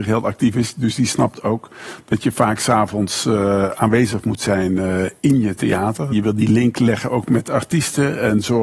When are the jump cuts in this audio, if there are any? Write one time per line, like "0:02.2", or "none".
0:06.1